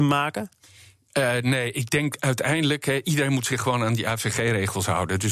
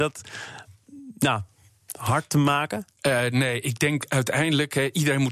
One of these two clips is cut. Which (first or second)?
second